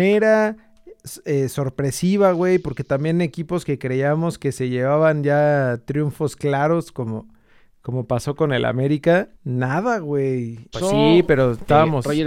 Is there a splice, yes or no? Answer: yes